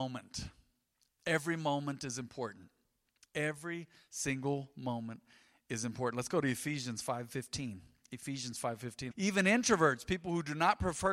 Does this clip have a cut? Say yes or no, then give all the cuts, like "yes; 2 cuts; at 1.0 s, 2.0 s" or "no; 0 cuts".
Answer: yes; 1 cut; at 9.1 s